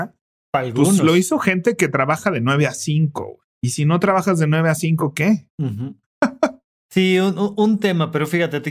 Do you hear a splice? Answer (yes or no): yes